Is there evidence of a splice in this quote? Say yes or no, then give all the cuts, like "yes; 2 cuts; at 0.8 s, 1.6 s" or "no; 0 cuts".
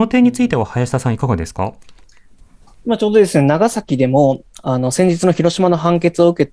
no; 0 cuts